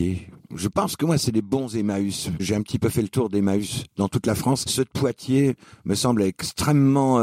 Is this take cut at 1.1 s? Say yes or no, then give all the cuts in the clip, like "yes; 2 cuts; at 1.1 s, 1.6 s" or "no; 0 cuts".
no; 2 cuts; at 2.4 s, 4.6 s